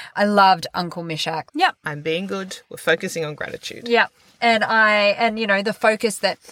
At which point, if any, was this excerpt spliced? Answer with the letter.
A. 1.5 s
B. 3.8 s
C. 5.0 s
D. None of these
A